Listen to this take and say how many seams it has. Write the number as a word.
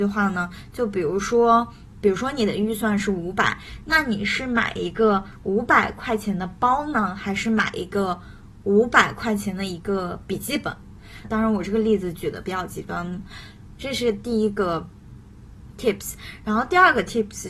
three